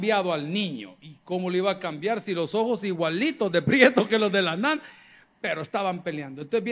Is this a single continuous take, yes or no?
yes